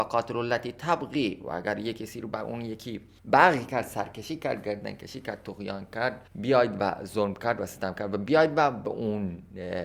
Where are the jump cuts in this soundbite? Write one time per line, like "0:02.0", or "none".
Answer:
0:06.3